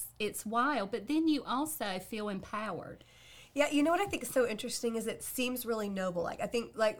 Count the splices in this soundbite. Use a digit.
0